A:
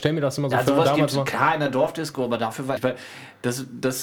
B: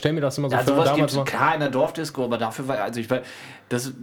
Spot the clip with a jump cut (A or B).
A